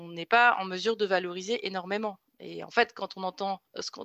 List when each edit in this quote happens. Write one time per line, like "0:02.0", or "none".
0:02.3